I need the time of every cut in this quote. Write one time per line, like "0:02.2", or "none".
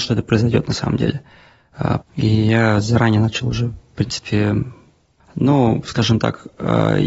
0:02.0
0:05.2